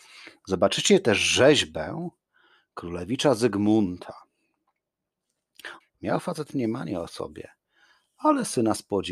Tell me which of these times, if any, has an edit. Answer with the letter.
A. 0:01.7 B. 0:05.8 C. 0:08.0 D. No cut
B